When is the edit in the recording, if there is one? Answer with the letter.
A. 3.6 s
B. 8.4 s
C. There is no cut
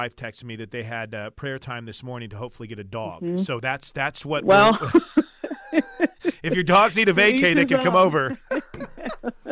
C